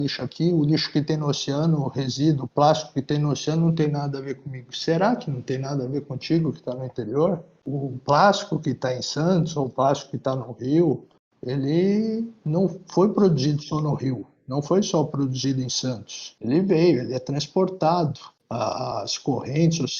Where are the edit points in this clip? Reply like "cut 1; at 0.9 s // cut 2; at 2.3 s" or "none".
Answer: cut 1; at 7.6 s